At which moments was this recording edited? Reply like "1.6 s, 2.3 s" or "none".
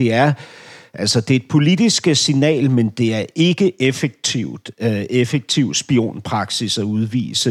none